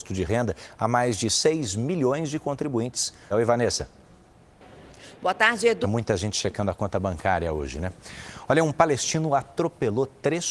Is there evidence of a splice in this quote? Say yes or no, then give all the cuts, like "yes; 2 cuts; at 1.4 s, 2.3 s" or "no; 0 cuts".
yes; 2 cuts; at 3.3 s, 5.8 s